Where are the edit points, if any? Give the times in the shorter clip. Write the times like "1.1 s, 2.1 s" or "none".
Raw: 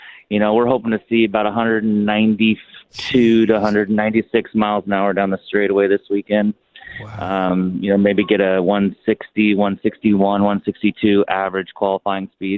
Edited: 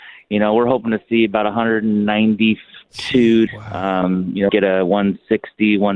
3.5 s, 4.5 s